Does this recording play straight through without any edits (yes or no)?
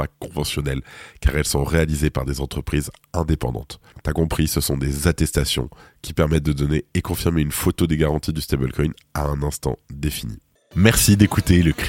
no